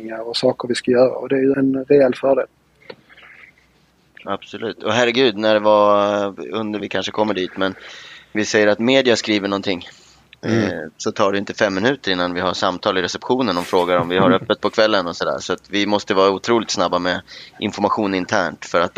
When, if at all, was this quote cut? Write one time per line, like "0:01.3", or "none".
0:01.5
0:06.8
0:08.3